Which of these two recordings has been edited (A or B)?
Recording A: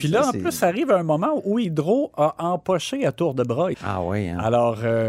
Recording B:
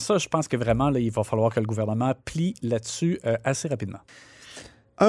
A